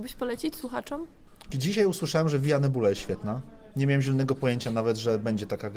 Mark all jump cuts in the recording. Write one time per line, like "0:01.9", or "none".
0:01.5